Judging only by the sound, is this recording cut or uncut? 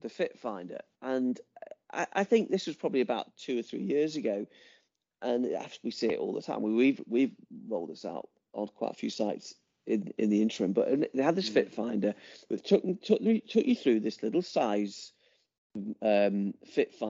uncut